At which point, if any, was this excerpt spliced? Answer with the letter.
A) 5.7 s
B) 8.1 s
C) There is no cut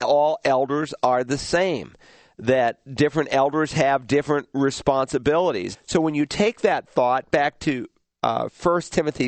A